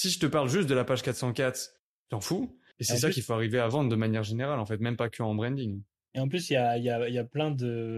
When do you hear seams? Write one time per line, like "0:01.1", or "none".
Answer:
0:02.7